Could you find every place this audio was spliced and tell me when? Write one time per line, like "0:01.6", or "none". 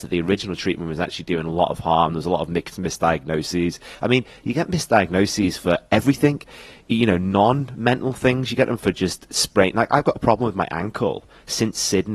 none